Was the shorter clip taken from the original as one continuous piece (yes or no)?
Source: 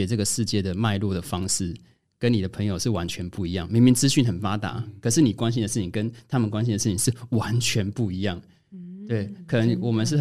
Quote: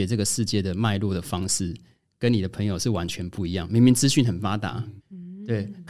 no